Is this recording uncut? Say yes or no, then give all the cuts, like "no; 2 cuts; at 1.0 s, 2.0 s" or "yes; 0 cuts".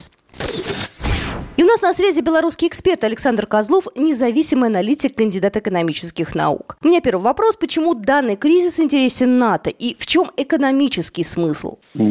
yes; 0 cuts